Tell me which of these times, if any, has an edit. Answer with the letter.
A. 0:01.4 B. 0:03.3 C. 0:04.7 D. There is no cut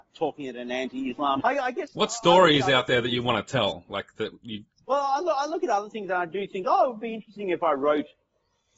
A